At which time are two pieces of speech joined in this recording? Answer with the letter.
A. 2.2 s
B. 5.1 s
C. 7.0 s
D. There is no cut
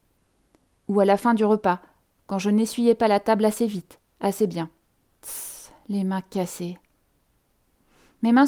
B